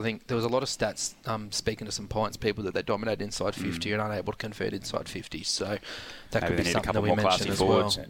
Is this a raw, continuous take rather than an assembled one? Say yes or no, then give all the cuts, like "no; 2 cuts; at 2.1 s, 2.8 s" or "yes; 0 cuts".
yes; 0 cuts